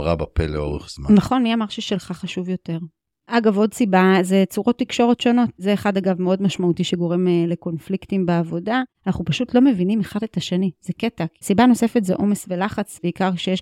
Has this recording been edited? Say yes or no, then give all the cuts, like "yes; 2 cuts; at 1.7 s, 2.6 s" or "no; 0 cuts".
no; 0 cuts